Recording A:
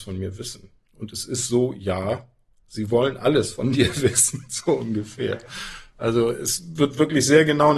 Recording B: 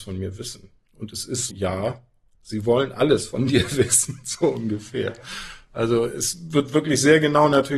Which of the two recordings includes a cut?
B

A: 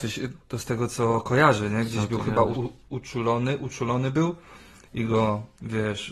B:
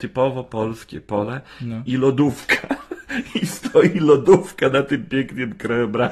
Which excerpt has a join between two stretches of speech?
A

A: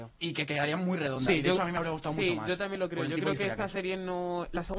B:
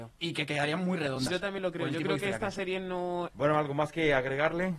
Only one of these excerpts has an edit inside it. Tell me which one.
B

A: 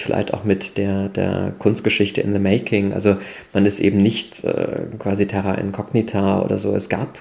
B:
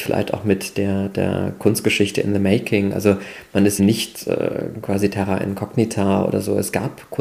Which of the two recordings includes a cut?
B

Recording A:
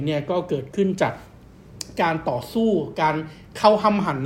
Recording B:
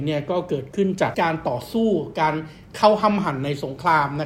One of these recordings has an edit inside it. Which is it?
B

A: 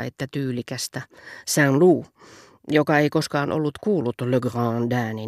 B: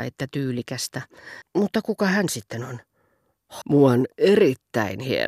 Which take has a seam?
B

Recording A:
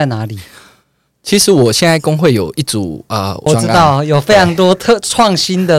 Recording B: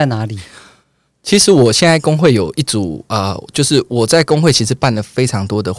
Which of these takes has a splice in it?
A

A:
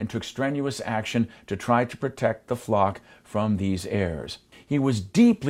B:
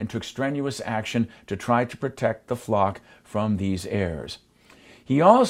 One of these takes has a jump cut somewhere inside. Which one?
A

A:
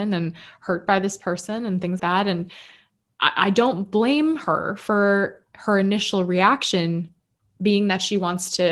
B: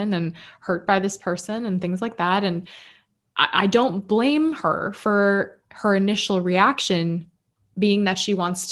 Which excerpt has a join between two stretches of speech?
A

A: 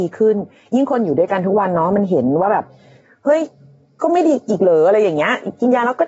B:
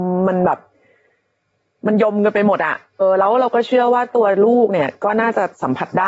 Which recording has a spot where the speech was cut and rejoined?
B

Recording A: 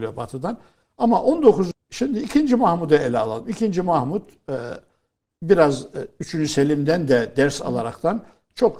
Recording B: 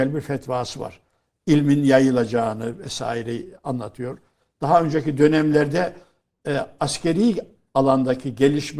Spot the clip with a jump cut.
A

